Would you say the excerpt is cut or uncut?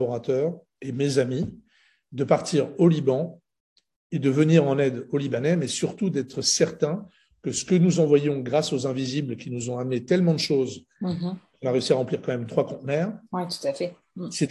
uncut